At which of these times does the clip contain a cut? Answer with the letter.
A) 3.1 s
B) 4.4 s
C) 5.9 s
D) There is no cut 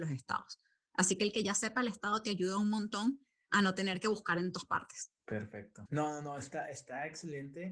C